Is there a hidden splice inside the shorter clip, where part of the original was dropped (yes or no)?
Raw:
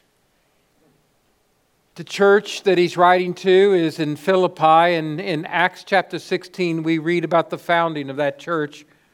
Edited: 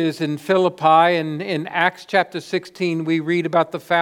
no